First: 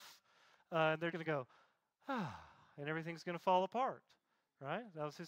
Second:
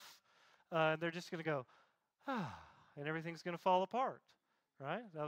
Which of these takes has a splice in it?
first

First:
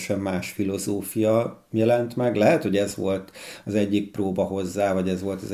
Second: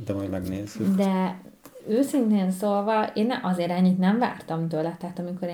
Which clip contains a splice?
first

